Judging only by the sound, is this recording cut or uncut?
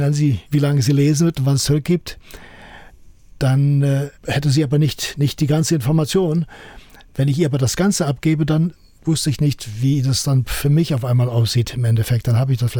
uncut